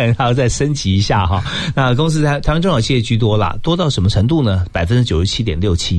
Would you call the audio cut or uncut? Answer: uncut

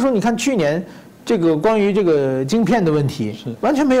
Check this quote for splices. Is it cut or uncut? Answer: uncut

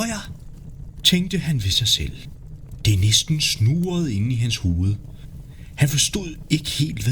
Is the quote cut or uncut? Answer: cut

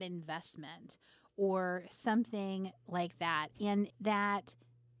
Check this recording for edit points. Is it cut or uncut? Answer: cut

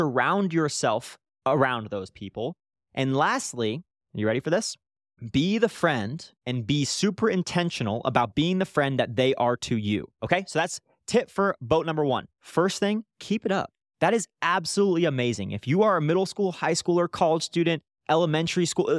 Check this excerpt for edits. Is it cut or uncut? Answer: cut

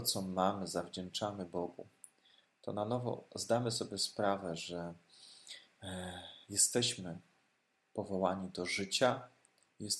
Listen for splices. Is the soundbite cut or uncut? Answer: uncut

